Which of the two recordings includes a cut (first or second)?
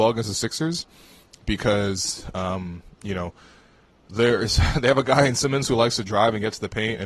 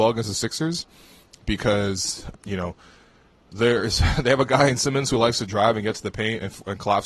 second